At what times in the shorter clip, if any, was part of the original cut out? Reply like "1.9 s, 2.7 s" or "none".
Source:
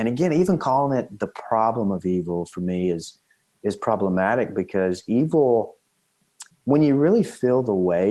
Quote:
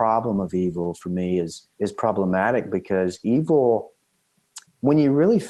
1.7 s

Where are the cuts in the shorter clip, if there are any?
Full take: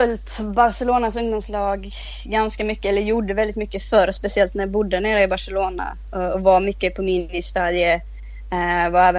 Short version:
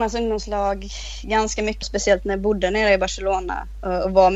1.8 s

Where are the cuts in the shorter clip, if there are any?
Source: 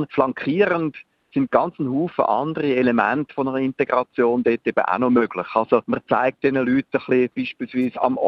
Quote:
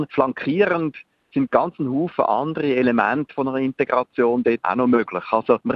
4.6 s

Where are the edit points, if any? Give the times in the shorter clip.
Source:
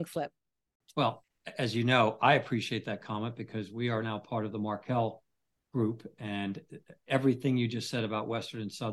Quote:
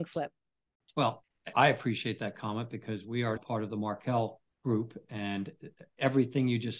1.5 s, 3.4 s, 4.5 s

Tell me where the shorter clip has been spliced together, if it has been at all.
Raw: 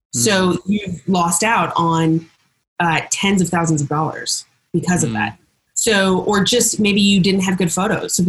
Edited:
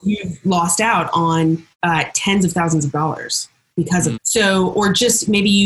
1.7 s, 4.1 s

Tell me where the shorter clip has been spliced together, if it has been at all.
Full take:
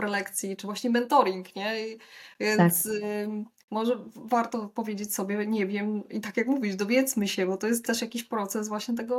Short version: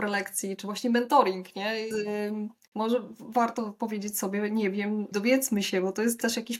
1.9 s, 5.1 s

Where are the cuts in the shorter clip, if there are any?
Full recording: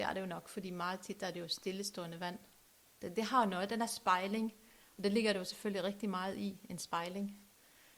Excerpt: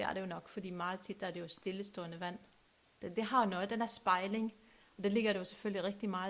none

